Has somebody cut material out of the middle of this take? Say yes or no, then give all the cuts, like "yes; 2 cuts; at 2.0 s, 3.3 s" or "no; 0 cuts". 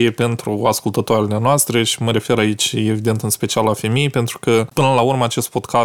yes; 1 cut; at 4.7 s